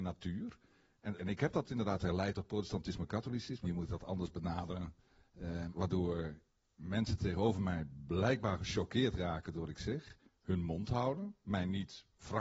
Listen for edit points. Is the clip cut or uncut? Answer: cut